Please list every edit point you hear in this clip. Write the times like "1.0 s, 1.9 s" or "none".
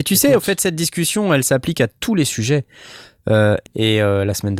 3.7 s